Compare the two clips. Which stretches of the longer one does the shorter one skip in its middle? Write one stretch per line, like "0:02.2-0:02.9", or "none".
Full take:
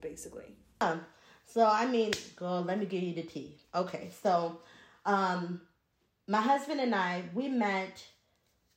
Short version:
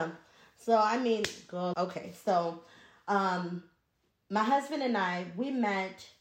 0:02.6-0:03.7